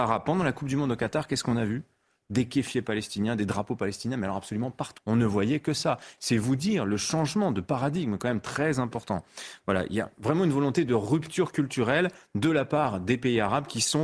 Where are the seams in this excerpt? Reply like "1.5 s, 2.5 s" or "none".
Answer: 5.0 s, 6.2 s